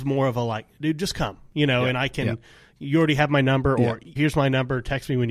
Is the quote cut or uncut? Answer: cut